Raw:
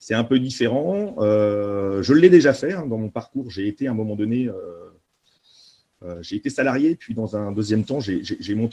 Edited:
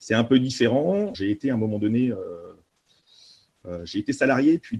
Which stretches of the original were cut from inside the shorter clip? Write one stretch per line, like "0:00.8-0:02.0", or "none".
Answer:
0:01.1-0:03.5